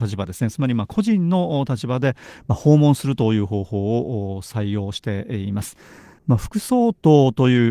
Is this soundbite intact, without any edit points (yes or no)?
yes